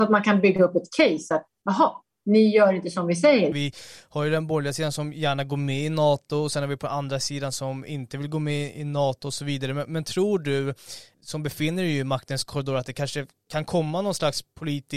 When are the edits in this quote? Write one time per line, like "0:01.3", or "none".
0:03.5
0:11.1